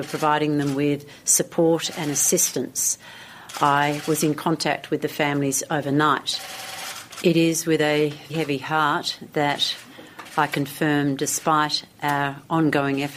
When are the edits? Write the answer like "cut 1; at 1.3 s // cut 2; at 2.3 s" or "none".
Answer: cut 1; at 7.2 s // cut 2; at 8.3 s

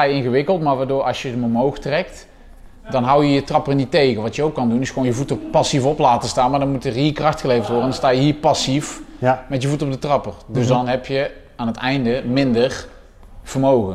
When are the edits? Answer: none

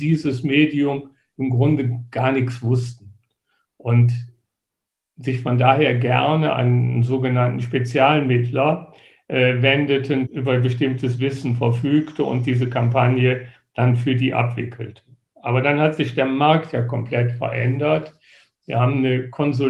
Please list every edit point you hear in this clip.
cut 1; at 10.2 s

